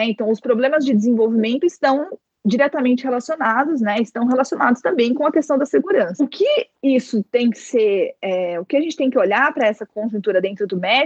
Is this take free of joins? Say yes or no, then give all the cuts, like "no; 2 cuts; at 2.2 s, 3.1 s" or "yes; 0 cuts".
yes; 0 cuts